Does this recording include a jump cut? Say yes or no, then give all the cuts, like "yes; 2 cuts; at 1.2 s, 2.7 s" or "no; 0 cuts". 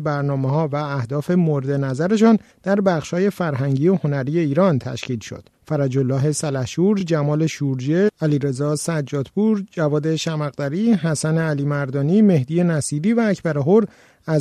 no; 0 cuts